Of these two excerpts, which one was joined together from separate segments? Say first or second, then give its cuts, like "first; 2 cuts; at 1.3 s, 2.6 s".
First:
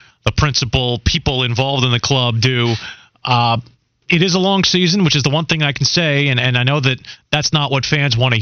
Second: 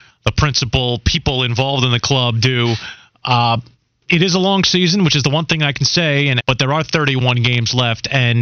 second; 1 cut; at 6.4 s